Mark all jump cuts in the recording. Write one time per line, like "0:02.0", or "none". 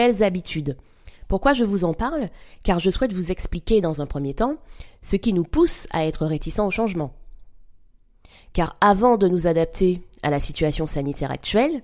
0:01.1